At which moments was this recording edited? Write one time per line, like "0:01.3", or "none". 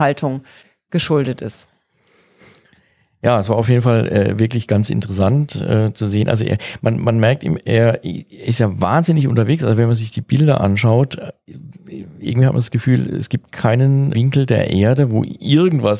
0:14.1